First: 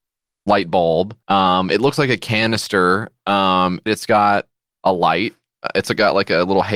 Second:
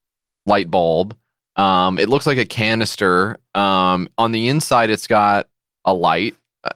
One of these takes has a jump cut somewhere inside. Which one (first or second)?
first